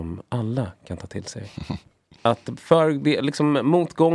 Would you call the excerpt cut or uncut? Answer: uncut